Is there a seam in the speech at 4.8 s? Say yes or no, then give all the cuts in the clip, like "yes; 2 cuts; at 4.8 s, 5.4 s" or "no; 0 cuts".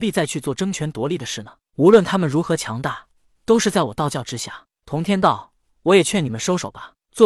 yes; 1 cut; at 4.8 s